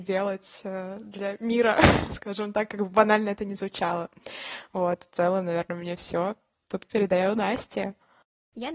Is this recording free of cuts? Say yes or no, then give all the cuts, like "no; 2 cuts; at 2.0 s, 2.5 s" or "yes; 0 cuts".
yes; 0 cuts